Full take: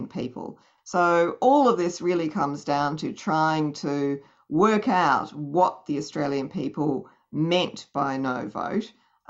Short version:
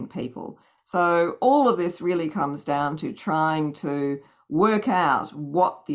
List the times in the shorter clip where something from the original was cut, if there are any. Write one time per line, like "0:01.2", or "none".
none

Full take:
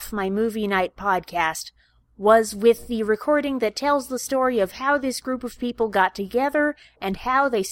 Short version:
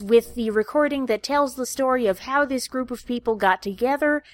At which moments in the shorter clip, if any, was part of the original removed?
none

